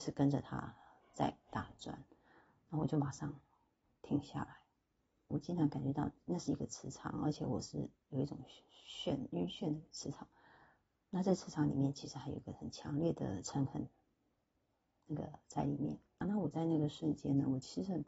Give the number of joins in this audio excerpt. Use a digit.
2